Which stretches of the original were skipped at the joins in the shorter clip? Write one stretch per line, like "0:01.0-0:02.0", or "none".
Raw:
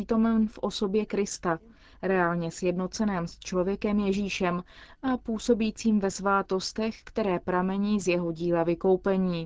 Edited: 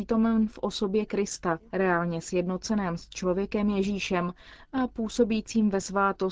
0:01.7-0:02.0